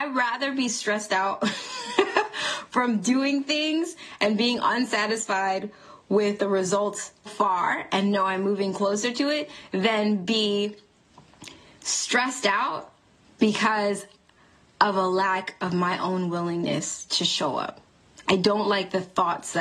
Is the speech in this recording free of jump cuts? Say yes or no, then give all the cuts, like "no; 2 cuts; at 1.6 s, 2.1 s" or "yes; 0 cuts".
no; 1 cut; at 7.3 s